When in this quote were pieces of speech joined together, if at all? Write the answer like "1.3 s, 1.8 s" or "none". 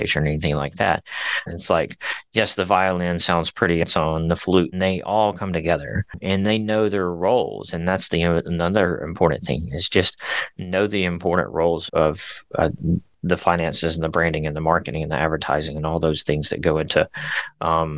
1.5 s, 11.9 s